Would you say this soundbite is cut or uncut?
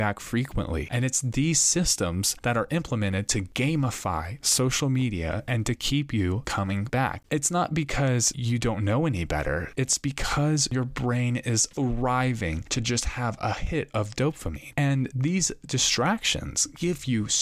cut